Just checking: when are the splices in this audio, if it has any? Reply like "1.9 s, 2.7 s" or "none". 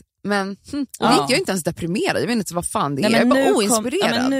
0.9 s